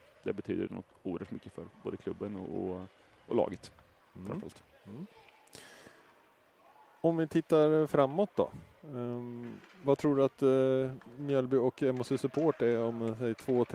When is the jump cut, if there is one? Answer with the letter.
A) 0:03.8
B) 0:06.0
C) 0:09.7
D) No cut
D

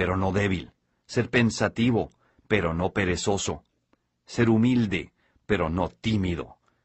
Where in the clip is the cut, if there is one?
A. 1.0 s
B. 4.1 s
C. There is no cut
A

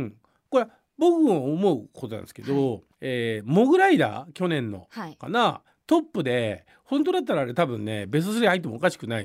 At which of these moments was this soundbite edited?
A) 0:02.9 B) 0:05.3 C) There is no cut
A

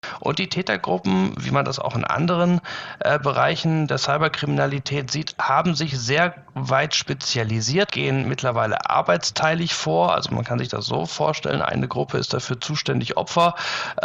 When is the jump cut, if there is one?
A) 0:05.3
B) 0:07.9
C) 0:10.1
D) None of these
B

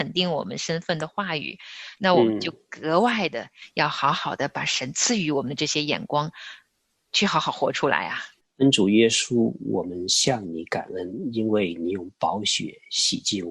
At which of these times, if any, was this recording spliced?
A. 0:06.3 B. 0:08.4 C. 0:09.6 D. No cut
B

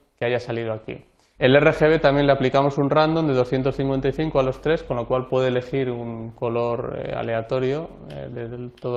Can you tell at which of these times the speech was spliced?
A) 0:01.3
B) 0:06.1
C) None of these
A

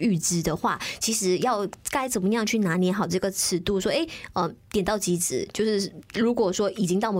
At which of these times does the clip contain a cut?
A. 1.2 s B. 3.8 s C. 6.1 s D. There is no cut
C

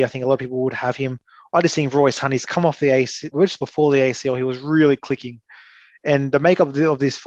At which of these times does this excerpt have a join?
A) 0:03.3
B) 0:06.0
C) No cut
A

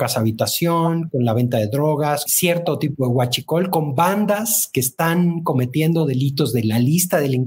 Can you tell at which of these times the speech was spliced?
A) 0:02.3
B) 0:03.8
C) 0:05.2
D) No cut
A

